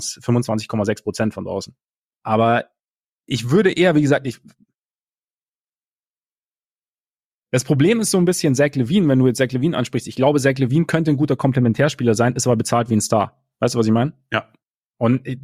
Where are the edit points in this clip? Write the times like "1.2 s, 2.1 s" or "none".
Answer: 2.1 s